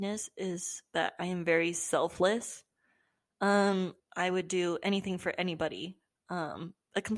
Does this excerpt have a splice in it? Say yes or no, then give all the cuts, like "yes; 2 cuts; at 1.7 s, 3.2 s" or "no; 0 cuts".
yes; 1 cut; at 4.0 s